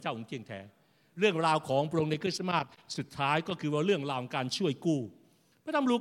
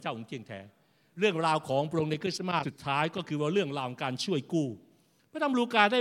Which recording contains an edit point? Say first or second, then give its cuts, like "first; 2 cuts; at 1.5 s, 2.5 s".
second; 1 cut; at 2.6 s